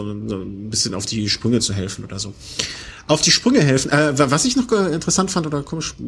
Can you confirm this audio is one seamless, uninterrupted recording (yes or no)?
yes